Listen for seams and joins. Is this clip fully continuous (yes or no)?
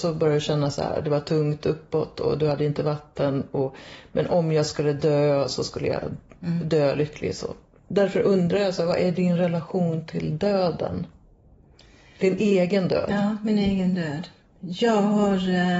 yes